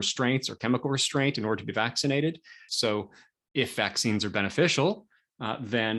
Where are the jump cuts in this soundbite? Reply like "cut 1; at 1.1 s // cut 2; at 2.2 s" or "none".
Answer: cut 1; at 2.7 s